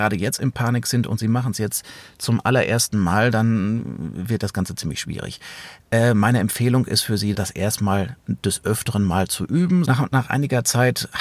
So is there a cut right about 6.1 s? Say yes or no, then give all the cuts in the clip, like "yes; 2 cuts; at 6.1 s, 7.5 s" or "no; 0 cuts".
no; 2 cuts; at 7.3 s, 9.8 s